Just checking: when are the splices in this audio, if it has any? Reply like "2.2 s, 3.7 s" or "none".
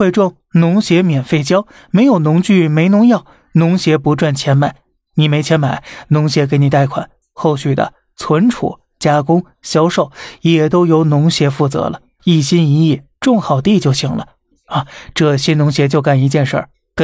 7.2 s, 12.2 s, 14.5 s